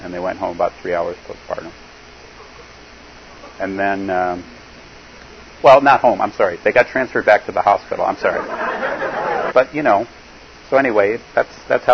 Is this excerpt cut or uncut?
cut